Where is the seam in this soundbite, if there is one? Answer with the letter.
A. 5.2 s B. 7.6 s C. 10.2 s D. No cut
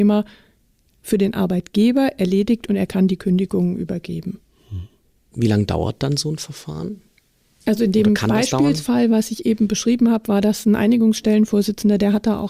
D